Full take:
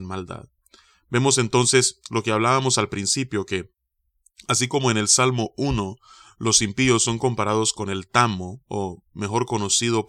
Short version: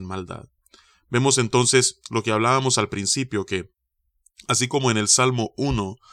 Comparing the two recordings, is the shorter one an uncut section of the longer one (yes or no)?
yes